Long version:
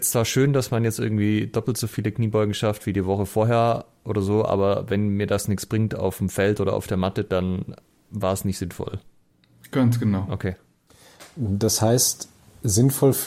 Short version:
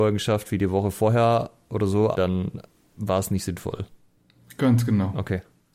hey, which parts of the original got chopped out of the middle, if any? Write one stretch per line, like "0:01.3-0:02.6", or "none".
0:04.5-0:07.3

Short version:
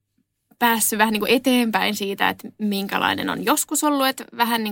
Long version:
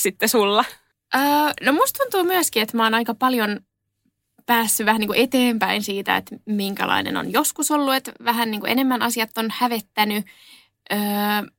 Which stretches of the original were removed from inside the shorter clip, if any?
none

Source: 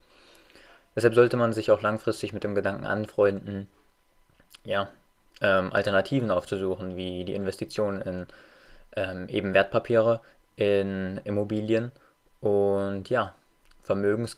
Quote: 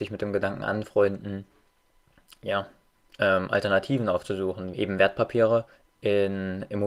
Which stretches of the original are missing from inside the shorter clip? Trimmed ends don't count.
0:07.0-0:09.3

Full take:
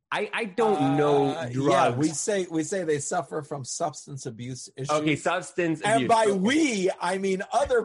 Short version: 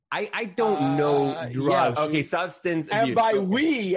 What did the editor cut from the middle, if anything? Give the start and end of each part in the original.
0:01.9-0:04.9

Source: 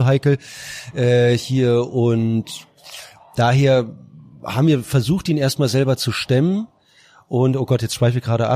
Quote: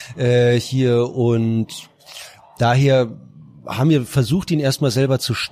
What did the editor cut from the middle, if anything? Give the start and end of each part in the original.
none

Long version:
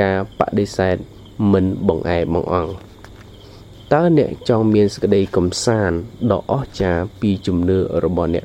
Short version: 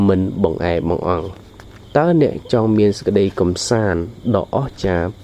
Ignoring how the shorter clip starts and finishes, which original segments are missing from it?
0:03.3-0:03.8

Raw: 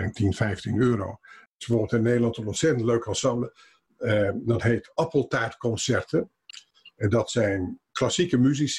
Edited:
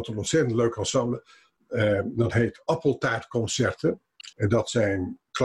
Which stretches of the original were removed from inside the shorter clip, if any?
0:06.6-0:06.9

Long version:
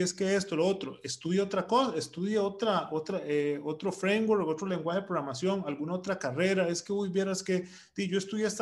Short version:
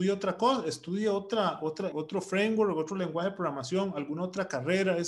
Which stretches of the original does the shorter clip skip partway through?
0:03.2-0:03.6

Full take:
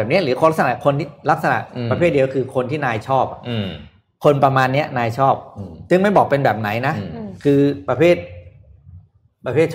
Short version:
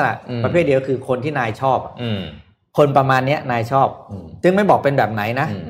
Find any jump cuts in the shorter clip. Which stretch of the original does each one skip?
none

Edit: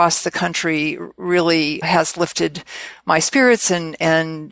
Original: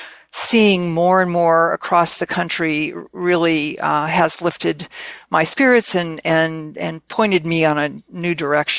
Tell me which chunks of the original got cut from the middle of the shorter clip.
0:03.8-0:04.1

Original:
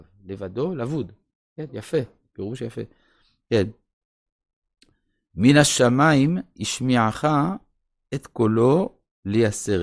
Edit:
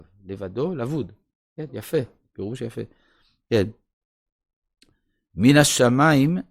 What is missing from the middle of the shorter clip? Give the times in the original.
none

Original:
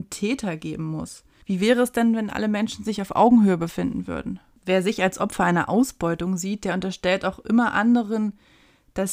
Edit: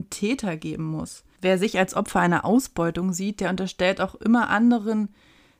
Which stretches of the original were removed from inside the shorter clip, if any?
0:01.4-0:04.6

